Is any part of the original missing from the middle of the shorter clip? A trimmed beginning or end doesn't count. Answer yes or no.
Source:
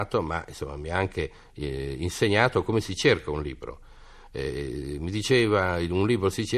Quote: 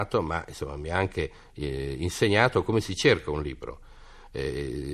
no